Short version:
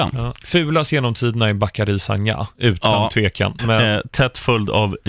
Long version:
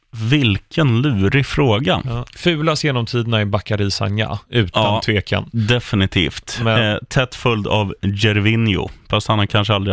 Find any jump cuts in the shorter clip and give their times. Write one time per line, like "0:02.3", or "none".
0:03.6